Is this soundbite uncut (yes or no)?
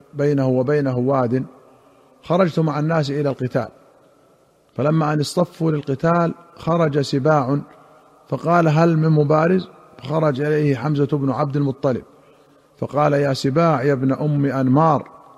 yes